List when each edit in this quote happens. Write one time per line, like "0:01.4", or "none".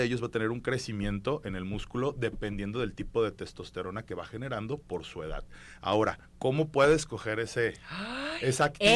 none